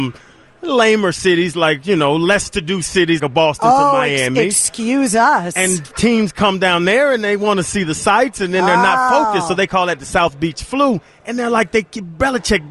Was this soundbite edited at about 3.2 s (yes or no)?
yes